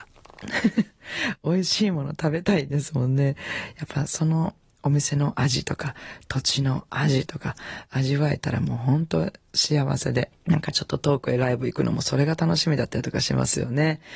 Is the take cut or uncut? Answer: uncut